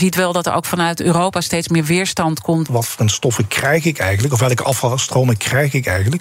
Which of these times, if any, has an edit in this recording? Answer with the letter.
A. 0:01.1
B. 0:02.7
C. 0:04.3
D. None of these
B